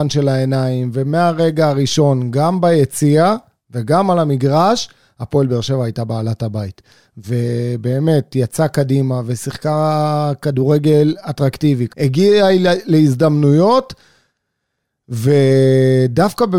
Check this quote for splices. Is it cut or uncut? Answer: cut